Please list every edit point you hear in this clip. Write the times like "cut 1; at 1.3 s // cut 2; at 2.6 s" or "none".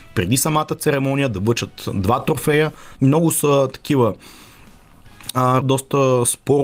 cut 1; at 3.0 s // cut 2; at 5.6 s